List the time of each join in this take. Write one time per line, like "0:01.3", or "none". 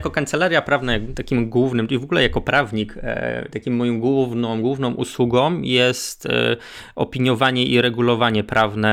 none